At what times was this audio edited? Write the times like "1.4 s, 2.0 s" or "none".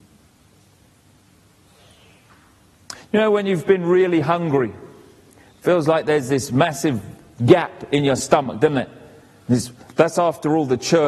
none